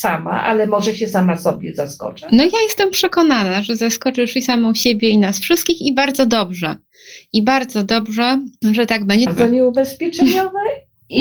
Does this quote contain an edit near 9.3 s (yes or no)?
yes